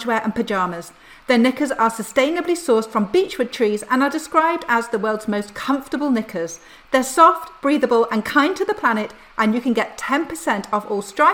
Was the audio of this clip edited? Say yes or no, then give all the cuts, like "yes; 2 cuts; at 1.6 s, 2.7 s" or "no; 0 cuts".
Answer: no; 0 cuts